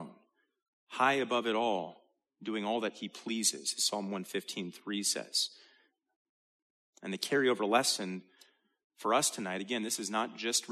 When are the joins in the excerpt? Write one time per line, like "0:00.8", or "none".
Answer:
none

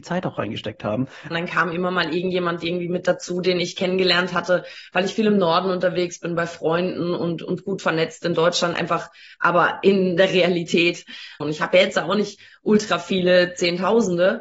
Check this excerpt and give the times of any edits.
0:01.3
0:11.4

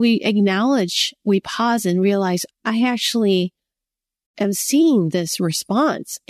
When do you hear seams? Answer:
0:02.5

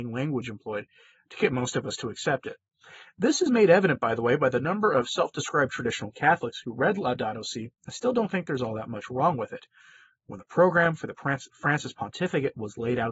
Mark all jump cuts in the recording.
none

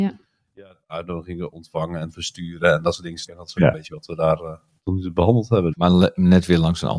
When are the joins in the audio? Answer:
0:03.3
0:05.7

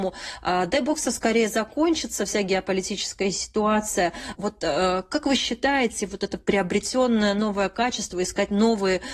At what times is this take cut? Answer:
0:04.4

